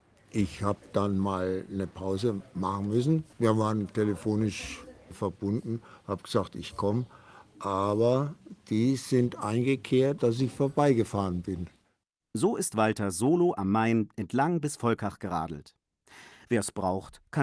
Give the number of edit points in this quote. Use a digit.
2